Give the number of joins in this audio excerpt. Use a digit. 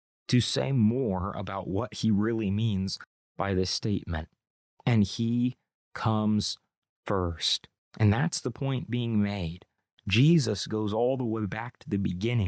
2